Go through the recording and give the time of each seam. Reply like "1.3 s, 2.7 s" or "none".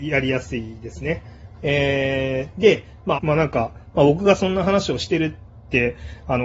1.6 s, 3.2 s